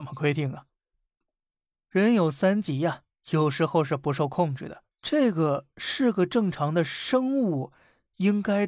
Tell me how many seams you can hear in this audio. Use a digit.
1